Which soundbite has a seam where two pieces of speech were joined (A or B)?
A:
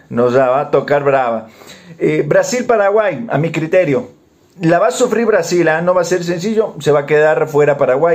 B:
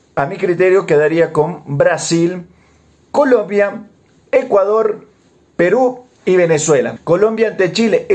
B